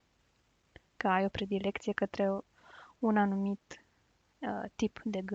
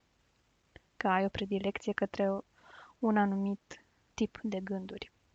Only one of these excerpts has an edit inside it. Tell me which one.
second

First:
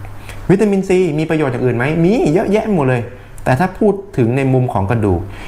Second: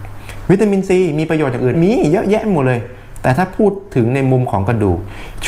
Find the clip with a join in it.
second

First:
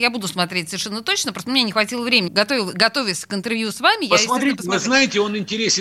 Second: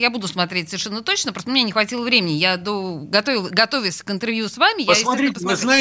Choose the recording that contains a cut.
first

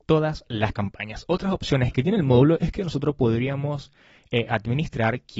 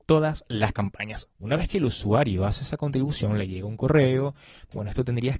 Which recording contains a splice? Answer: second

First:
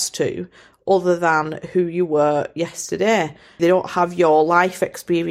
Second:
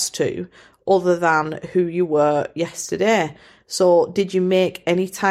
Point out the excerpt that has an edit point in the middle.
first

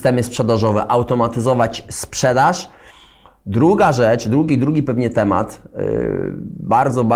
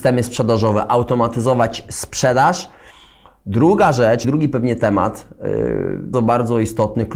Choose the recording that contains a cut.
second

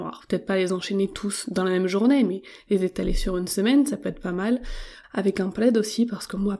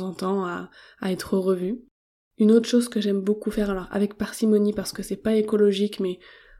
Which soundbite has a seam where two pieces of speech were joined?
first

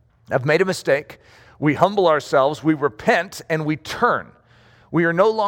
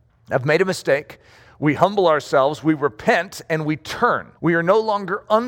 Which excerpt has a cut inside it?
second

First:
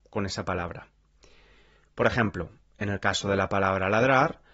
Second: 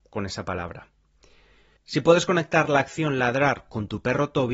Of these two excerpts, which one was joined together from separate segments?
second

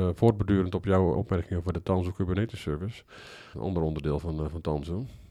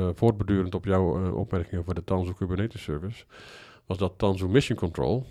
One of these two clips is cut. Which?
first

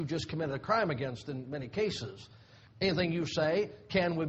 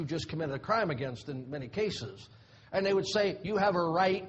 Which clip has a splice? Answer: first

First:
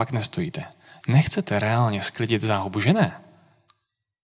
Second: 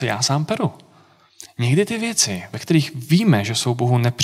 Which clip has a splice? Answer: first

